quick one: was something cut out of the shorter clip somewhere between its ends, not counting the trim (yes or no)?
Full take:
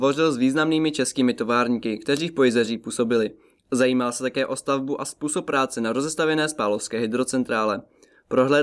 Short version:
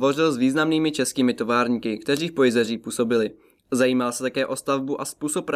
no